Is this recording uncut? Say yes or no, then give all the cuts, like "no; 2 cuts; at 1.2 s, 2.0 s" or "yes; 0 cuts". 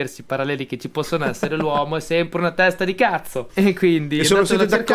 no; 1 cut; at 3.5 s